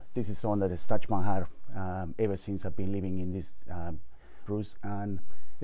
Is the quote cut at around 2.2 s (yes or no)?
no